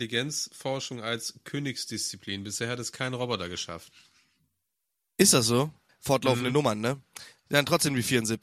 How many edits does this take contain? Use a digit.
1